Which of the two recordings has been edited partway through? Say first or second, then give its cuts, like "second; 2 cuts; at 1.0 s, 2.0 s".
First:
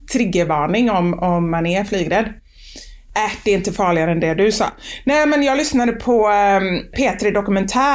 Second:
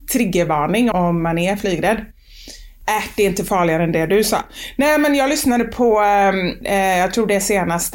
second; 2 cuts; at 0.9 s, 6.6 s